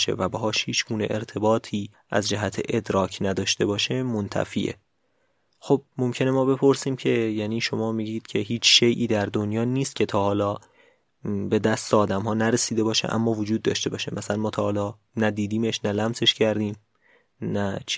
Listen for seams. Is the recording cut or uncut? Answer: uncut